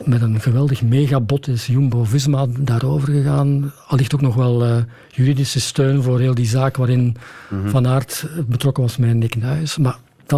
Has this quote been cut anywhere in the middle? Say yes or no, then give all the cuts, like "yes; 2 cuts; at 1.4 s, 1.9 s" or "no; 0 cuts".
no; 0 cuts